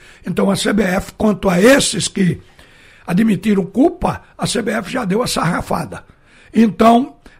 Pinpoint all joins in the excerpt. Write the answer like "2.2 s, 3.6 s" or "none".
none